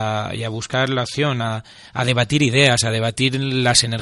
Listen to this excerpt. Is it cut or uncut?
uncut